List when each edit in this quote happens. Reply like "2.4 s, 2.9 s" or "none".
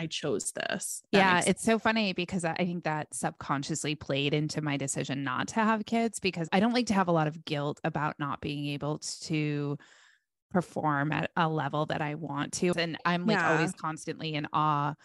12.7 s